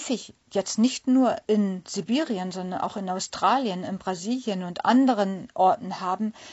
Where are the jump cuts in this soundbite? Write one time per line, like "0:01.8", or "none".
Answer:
none